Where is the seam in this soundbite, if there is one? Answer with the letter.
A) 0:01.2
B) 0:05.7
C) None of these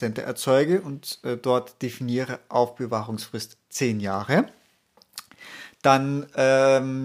C